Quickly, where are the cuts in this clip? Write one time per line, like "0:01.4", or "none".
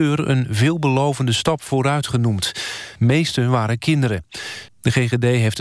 0:03.0
0:04.7